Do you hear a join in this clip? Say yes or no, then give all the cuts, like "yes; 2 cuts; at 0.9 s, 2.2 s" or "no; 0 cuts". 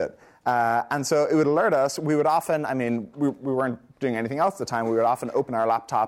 no; 0 cuts